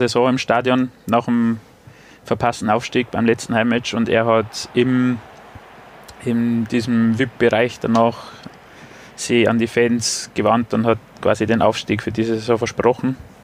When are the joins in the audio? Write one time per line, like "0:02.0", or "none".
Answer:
none